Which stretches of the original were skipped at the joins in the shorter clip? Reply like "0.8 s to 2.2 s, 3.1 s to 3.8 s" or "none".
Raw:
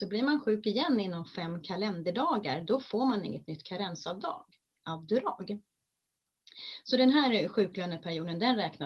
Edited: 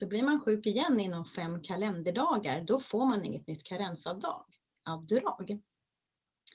none